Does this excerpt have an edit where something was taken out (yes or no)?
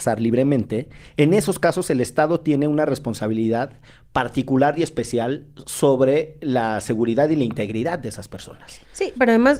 no